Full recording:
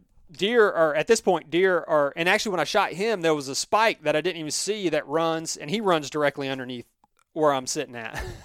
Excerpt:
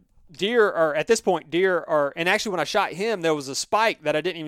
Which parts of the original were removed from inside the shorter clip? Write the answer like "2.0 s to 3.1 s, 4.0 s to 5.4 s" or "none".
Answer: none